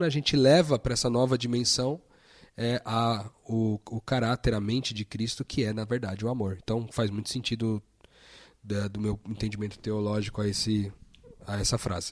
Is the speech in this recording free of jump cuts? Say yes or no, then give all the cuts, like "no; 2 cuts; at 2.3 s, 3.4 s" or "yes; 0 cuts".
yes; 0 cuts